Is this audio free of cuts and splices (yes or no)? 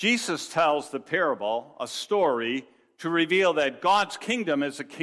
yes